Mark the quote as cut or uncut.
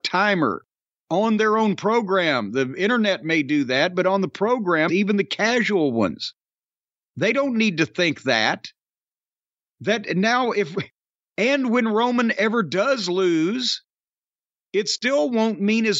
cut